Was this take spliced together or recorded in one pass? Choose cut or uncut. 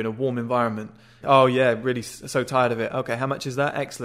cut